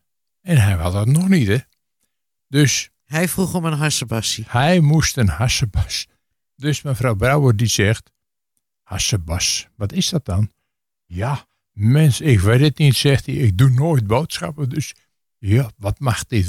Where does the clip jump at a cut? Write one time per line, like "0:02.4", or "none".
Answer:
none